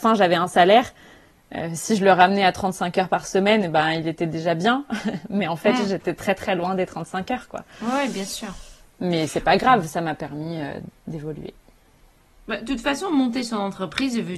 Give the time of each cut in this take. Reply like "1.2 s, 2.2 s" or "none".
none